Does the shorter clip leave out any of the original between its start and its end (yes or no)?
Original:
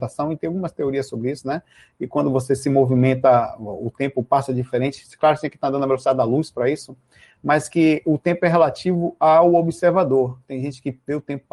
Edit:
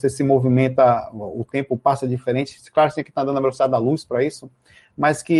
no